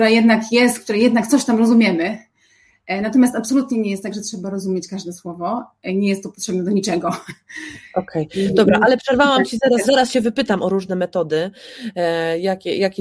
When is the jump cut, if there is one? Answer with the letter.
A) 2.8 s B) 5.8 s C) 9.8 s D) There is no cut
C